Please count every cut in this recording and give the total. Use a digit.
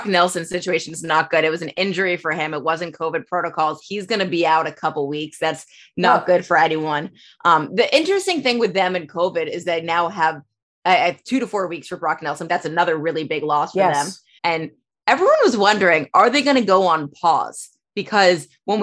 2